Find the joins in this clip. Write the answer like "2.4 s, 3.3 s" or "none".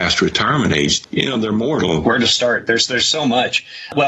1.0 s, 2.0 s